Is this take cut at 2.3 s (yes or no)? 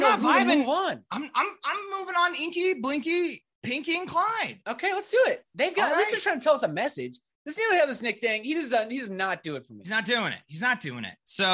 no